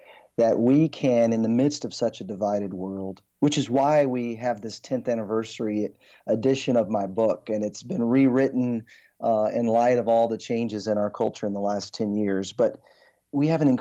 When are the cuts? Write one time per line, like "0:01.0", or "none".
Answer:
none